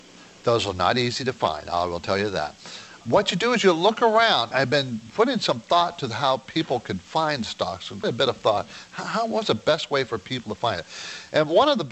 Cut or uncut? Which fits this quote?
cut